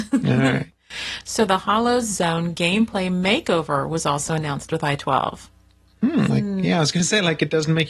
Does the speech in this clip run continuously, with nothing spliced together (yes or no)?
no